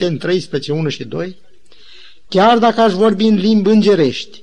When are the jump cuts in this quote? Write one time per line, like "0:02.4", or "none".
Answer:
none